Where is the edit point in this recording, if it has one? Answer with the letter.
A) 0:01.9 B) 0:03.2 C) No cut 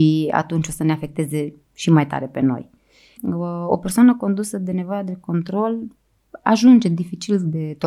B